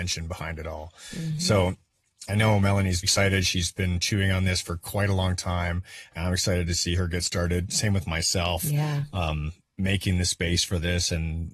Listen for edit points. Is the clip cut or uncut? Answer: cut